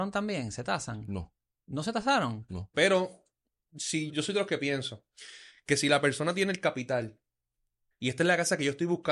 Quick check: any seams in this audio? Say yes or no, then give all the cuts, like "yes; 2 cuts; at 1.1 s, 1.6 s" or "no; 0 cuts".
yes; 3 cuts; at 2.7 s, 4.1 s, 7.9 s